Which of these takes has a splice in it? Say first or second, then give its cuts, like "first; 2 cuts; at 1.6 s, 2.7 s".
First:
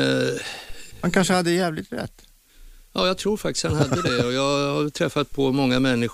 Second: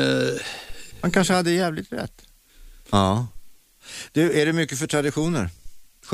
second; 1 cut; at 2.8 s